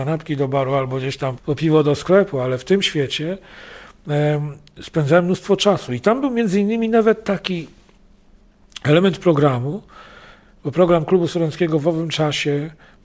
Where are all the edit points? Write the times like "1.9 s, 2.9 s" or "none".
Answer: 1.4 s